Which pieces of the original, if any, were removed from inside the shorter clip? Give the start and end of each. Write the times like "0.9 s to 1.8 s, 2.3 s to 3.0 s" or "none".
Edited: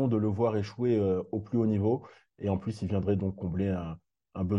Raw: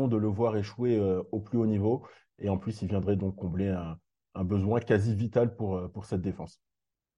none